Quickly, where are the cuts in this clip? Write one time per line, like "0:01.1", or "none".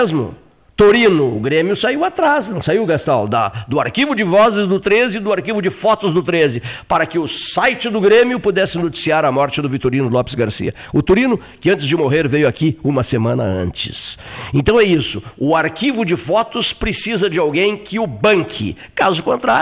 none

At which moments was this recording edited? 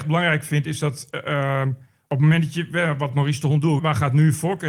0:03.8

